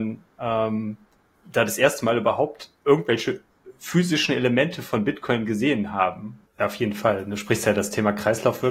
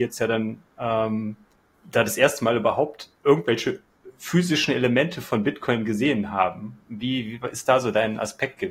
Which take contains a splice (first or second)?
first